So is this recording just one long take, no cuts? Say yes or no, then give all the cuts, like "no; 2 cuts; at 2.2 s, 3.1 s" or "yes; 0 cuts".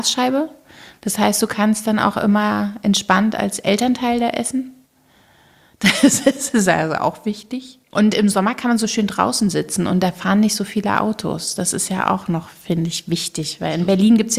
no; 1 cut; at 7.9 s